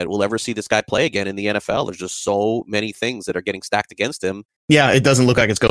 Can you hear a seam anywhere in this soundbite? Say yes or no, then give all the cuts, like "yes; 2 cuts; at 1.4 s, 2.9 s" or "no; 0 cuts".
yes; 1 cut; at 4.6 s